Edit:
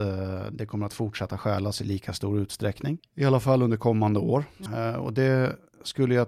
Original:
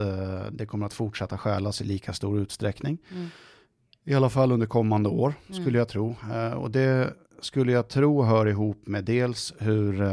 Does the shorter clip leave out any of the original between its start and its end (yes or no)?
yes